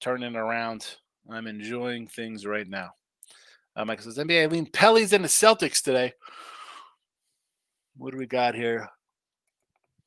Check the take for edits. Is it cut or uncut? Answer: uncut